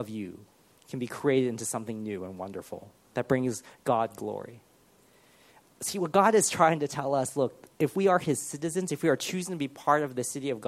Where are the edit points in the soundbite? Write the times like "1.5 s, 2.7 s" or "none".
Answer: none